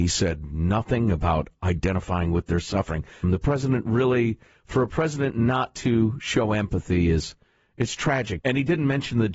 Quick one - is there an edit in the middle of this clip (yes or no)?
yes